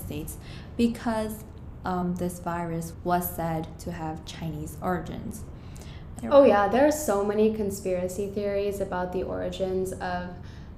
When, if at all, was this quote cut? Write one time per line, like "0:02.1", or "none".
0:06.2